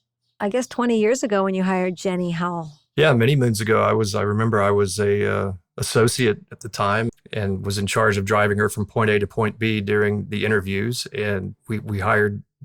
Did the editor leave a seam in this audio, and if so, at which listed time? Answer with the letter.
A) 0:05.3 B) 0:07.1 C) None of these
B